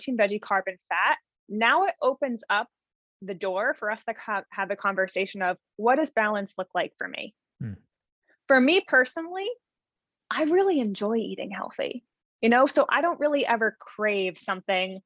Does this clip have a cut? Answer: no; 0 cuts

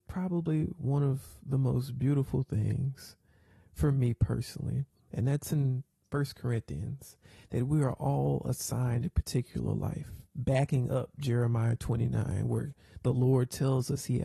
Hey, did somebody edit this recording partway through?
no; 0 cuts

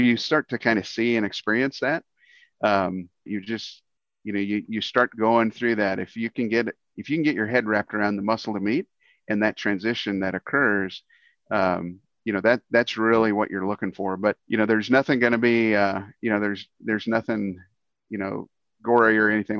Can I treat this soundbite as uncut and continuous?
no; 2 cuts; at 3.3 s, 14.4 s

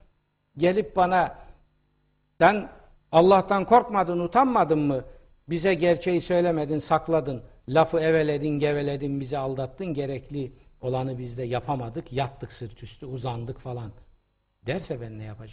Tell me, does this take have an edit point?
no; 0 cuts

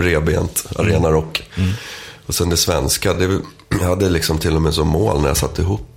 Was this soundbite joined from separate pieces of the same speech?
no; 0 cuts

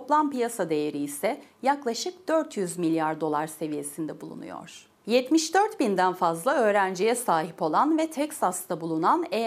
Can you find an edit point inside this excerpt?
yes; 1 cut; at 5.0 s

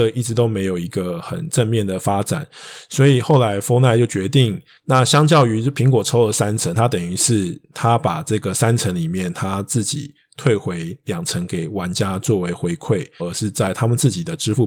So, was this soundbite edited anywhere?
yes; 2 cuts; at 4.8 s, 13.2 s

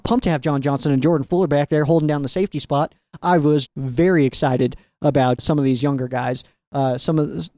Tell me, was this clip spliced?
yes; 2 cuts; at 3.7 s, 5.4 s

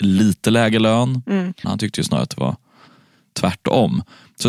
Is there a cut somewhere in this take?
yes; 1 cut; at 1.6 s

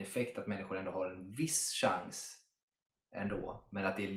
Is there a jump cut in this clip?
no; 0 cuts

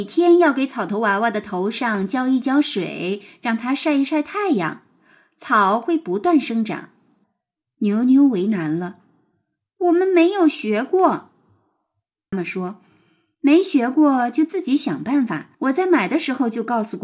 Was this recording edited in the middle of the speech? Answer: yes; 3 cuts; at 7.2 s, 12.3 s, 15.5 s

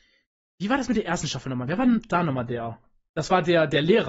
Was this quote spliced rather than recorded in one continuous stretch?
no; 0 cuts

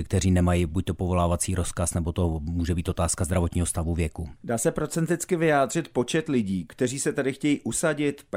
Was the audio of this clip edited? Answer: yes; 1 cut; at 4.4 s

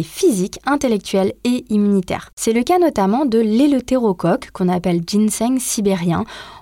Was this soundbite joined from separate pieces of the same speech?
no; 0 cuts

